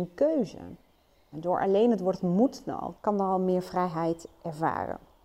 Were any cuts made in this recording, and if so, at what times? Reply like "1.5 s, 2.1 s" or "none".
1.3 s, 2.9 s